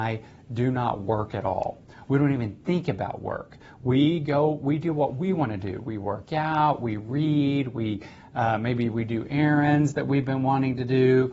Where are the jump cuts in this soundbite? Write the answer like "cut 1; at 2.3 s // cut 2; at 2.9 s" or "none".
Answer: none